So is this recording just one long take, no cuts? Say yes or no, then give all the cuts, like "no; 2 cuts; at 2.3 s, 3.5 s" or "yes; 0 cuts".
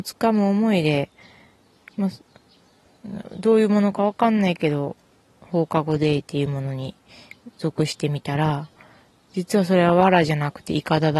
yes; 0 cuts